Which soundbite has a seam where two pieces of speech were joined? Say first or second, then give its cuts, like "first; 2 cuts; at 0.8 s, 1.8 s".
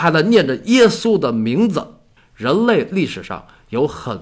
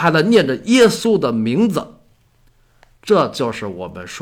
first; 1 cut; at 2.2 s